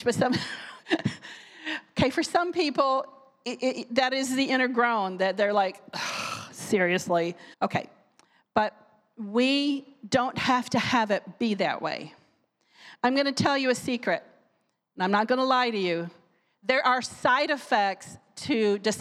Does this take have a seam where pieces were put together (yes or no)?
yes